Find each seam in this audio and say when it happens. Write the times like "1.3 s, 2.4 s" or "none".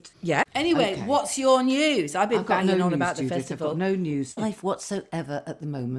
4.4 s